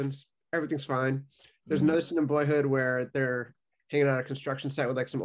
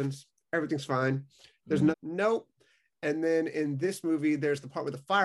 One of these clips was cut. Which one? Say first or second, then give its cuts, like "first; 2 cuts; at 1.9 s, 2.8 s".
second; 1 cut; at 1.9 s